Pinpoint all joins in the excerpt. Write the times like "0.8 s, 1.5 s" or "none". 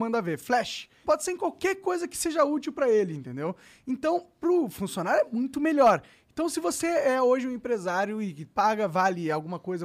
1.0 s